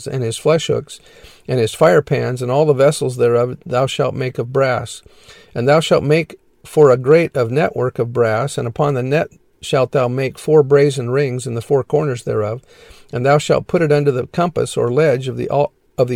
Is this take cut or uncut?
uncut